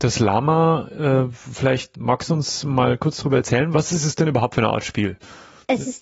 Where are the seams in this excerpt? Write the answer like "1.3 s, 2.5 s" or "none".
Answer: 1.9 s, 3.7 s